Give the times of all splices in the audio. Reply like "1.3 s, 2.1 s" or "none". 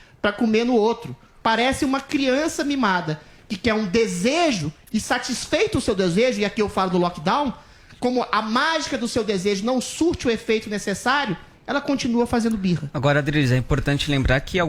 1.4 s